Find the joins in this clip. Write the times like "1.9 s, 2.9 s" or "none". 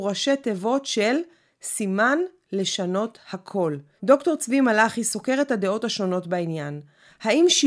4.0 s